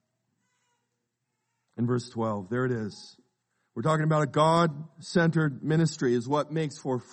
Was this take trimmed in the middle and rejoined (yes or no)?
no